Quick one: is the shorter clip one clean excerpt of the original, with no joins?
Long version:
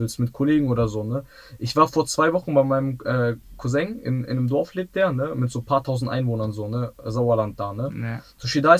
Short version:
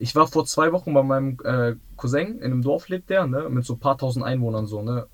no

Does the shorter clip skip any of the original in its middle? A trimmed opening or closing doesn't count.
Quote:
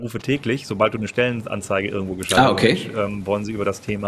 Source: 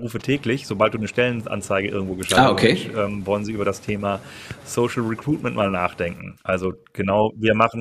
no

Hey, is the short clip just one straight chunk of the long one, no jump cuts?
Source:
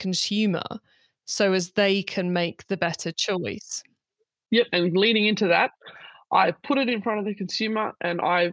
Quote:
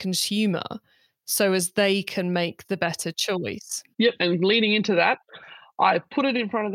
no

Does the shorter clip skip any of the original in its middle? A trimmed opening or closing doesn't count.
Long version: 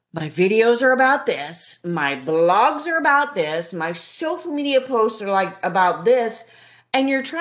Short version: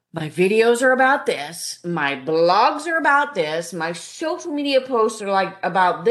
no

